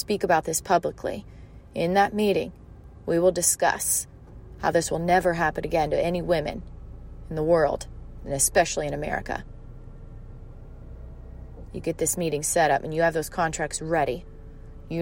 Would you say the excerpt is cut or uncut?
uncut